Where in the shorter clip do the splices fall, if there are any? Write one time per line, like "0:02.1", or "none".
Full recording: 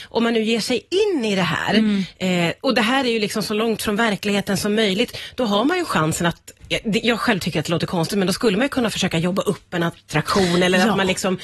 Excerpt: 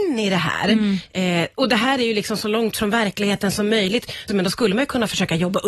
0:04.3